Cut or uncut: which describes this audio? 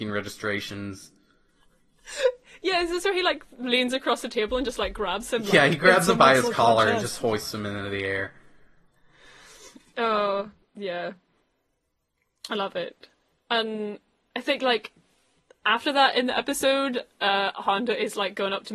uncut